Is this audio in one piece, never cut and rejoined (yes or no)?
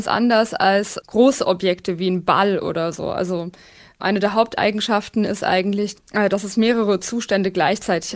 no